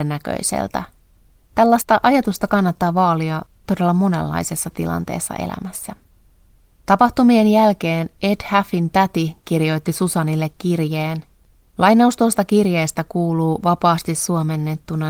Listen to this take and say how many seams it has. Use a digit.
0